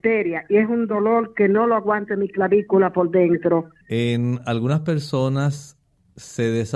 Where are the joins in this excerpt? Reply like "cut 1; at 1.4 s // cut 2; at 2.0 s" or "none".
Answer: cut 1; at 3.8 s